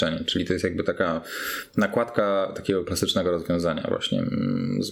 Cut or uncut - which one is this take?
uncut